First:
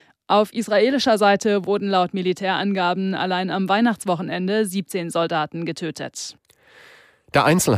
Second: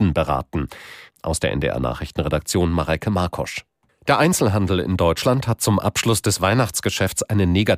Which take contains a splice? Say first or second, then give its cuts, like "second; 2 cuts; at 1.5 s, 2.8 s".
second; 2 cuts; at 1.1 s, 3.9 s